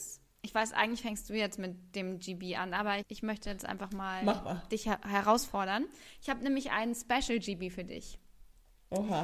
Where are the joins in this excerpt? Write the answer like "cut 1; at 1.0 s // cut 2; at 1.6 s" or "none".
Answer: cut 1; at 3.0 s